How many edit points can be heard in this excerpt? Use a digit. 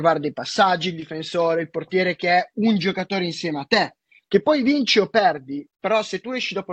2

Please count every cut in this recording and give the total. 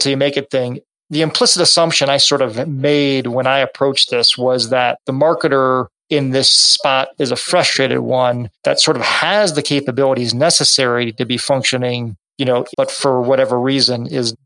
1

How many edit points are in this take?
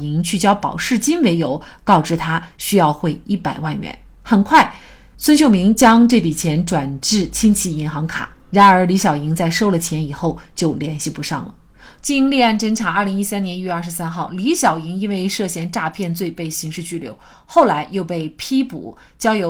1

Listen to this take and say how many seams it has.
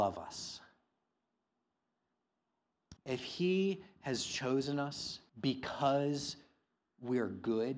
2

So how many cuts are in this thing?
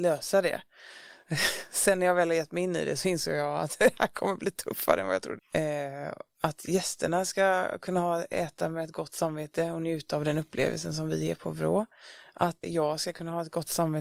2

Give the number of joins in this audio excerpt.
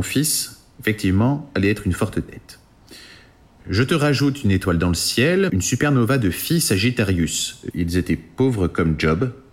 2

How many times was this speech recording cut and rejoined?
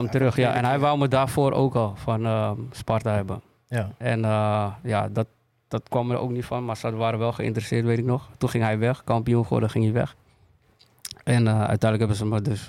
0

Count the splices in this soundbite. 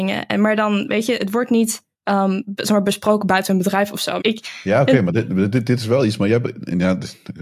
2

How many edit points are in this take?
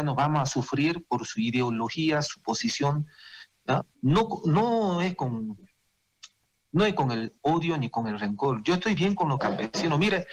2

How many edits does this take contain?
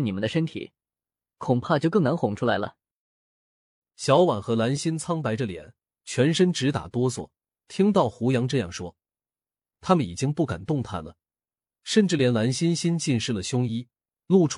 1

